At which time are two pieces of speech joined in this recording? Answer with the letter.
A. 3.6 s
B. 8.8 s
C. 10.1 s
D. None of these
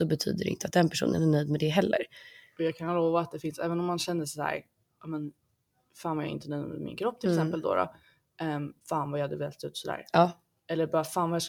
B